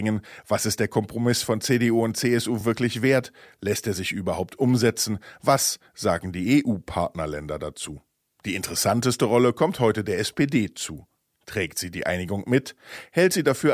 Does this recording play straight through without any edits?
yes; 0 cuts

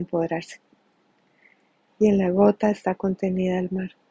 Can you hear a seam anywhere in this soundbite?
yes; 1 cut; at 1.9 s

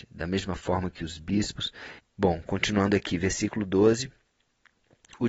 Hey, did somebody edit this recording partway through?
yes; 1 cut; at 2.0 s

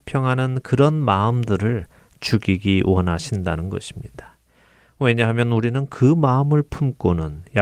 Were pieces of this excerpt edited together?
no; 0 cuts

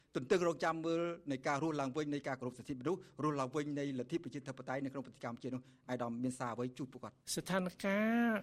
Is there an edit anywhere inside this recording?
yes; 1 cut; at 7.2 s

